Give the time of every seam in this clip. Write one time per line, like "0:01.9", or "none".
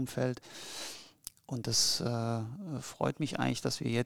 none